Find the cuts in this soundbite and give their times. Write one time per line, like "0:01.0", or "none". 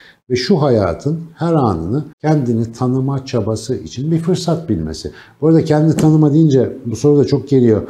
0:02.1